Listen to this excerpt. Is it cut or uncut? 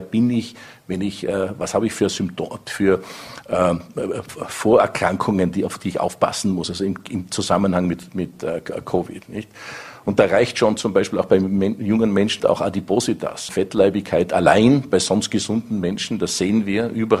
cut